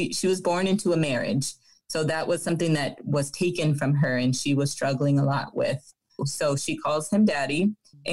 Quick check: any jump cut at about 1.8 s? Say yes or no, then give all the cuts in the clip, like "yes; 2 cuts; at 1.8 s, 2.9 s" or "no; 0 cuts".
no; 1 cut; at 6.2 s